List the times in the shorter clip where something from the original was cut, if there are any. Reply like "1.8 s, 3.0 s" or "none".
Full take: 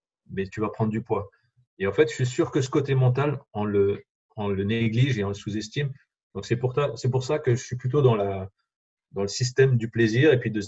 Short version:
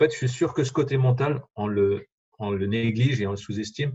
none